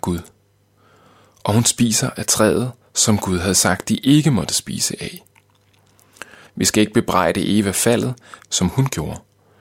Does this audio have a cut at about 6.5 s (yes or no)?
yes